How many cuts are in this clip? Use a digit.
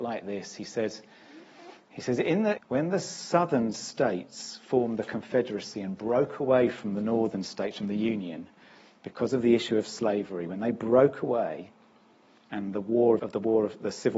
2